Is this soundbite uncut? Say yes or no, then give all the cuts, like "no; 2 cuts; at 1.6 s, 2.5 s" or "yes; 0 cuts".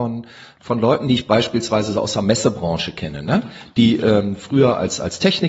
yes; 0 cuts